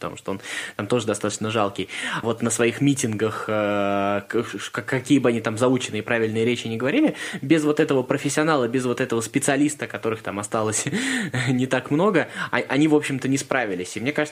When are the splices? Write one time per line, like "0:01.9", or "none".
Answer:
0:02.2